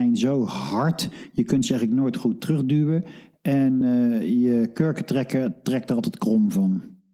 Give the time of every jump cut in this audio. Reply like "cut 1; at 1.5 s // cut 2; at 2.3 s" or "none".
none